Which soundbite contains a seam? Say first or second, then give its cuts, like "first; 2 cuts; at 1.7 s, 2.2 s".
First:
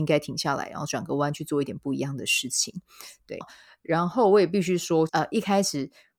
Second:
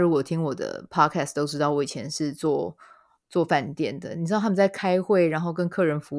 first; 2 cuts; at 3.4 s, 5.1 s